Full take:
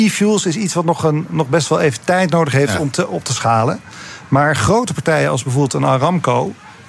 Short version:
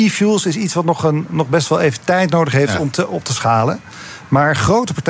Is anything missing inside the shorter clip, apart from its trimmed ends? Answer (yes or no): no